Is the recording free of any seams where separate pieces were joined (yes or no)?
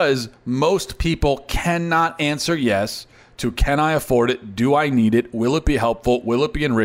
yes